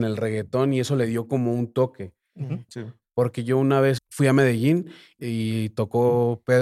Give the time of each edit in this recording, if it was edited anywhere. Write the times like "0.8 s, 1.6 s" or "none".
2.7 s, 4.0 s, 5.2 s